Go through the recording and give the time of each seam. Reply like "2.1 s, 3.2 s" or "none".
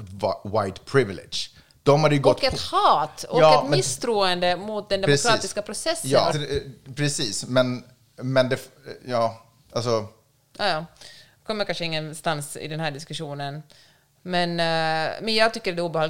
6.3 s